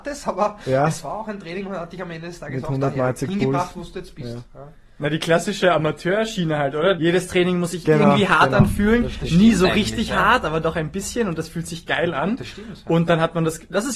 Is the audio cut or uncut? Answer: cut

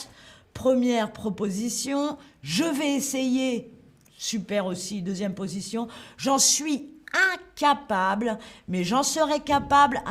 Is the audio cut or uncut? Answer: uncut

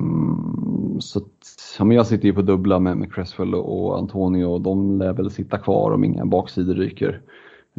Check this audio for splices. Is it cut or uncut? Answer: uncut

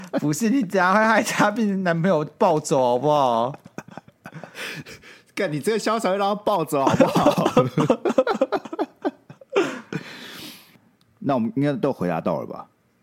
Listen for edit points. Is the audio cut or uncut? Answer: uncut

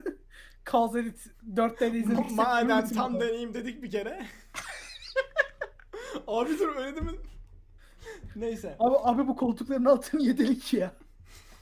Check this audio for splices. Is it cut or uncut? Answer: uncut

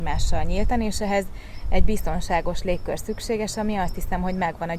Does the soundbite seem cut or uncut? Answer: uncut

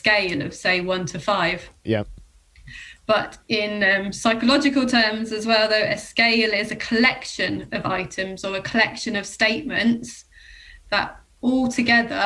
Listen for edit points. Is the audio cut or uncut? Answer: uncut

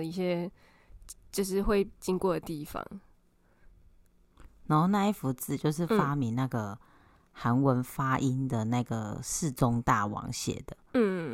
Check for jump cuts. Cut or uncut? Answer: cut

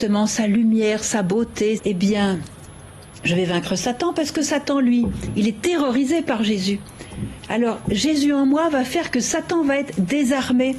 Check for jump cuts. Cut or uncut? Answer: cut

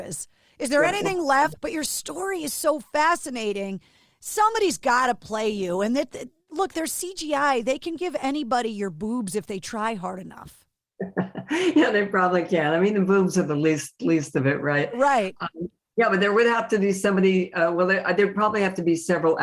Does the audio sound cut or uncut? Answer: cut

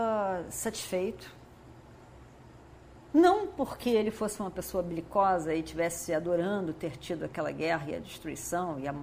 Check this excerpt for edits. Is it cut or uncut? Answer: uncut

